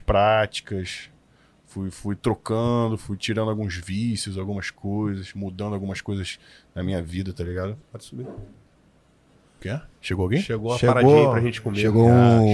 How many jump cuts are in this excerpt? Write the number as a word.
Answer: two